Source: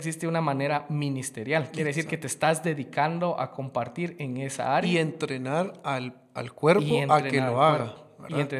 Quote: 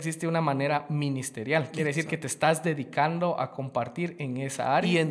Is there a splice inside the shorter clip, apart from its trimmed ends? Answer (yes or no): no